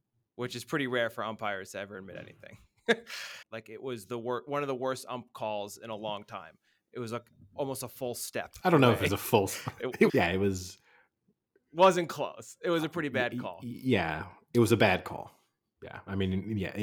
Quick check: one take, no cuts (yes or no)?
no